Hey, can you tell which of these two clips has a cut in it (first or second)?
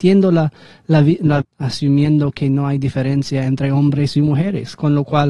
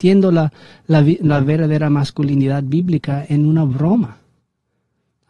first